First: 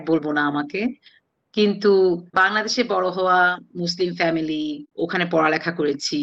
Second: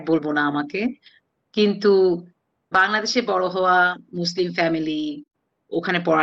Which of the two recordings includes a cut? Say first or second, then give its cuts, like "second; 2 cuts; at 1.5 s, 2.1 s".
first; 2 cuts; at 2.3 s, 4.9 s